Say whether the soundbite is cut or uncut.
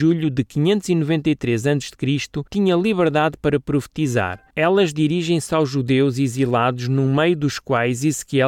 cut